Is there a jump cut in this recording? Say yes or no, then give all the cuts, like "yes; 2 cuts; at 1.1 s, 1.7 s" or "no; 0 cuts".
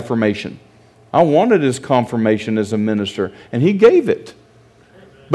no; 0 cuts